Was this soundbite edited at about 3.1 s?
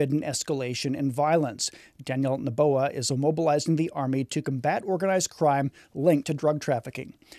yes; 1 cut; at 3.1 s

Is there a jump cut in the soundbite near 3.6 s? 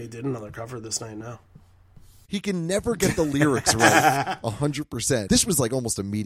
no; 2 cuts; at 2.3 s, 5.3 s

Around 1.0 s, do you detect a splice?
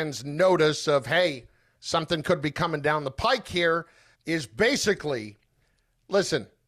no; 1 cut; at 4.1 s

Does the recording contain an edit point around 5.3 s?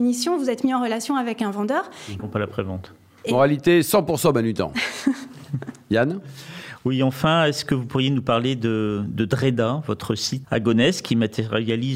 no; 2 cuts; at 2.2 s, 10.4 s

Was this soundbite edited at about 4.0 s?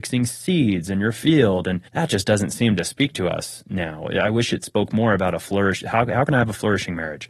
no; 1 cut; at 1.9 s

